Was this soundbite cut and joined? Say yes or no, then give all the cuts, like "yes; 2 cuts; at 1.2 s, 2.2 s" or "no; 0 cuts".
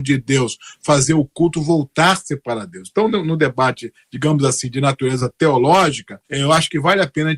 yes; 1 cut; at 6.2 s